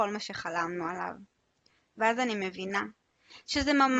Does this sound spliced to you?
no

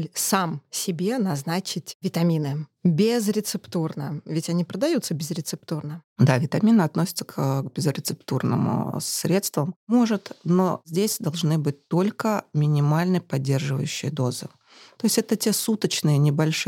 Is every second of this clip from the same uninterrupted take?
yes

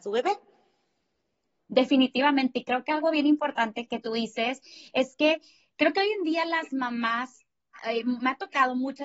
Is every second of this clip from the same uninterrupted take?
no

